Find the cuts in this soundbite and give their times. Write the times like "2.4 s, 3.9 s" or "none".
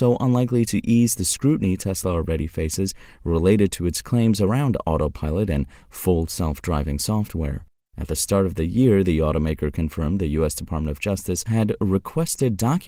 none